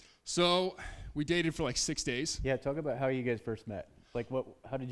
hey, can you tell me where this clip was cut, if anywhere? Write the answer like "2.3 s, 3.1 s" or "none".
none